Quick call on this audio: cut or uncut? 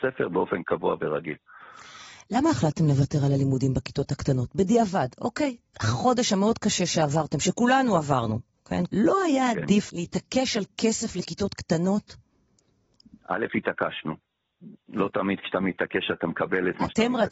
cut